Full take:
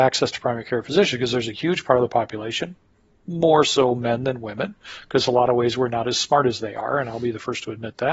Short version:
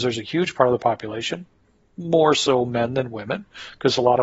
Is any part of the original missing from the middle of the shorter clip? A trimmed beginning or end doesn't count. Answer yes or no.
no